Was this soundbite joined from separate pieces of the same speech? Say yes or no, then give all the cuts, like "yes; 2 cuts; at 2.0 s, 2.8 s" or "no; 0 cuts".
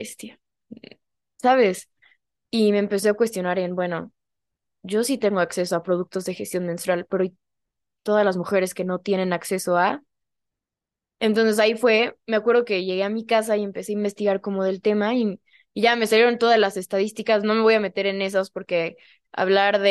no; 0 cuts